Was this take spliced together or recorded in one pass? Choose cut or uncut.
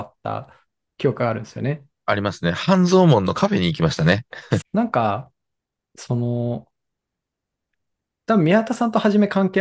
cut